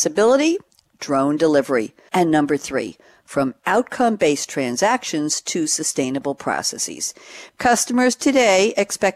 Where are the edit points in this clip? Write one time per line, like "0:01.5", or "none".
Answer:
0:02.1
0:07.5